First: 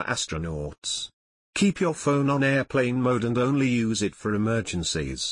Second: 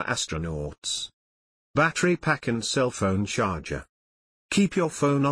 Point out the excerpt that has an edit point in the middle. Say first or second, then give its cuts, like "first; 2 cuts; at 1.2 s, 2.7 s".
first; 1 cut; at 1.4 s